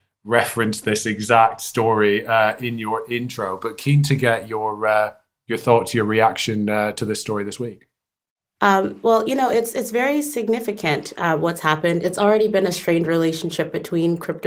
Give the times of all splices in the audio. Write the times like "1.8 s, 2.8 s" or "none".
none